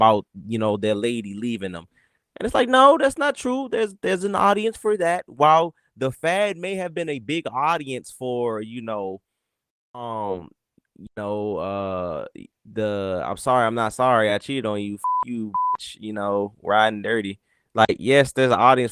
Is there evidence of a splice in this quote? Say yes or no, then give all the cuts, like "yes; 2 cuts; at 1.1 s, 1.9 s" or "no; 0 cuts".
no; 0 cuts